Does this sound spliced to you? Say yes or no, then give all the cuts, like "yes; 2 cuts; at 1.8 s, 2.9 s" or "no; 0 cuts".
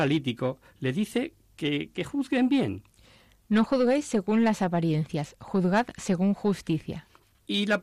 no; 0 cuts